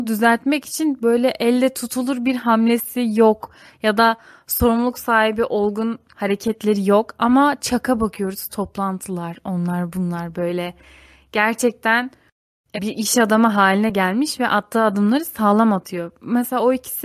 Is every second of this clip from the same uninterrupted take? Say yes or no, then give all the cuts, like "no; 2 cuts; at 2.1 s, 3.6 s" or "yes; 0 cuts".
no; 1 cut; at 12.8 s